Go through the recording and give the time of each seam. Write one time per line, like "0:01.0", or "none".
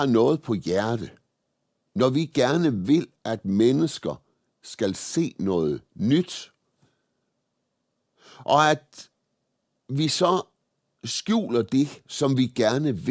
none